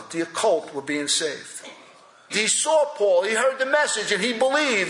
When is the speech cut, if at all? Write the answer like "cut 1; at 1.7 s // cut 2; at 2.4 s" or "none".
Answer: cut 1; at 2.3 s